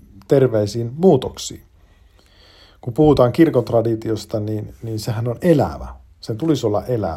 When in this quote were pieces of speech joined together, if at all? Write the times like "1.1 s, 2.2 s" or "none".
none